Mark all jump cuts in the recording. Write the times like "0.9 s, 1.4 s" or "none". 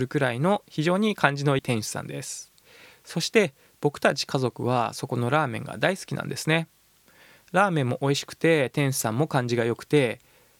1.6 s

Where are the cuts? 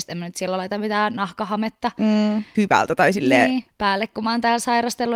2.5 s, 3.7 s

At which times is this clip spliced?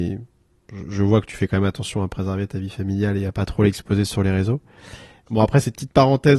5.3 s

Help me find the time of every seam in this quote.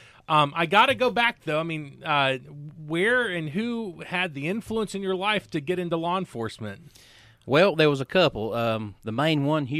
none

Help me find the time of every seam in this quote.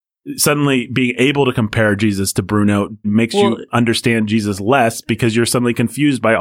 3.0 s

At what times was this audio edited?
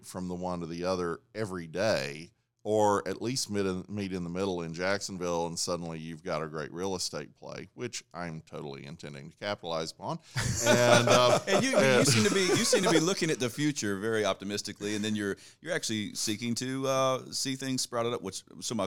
none

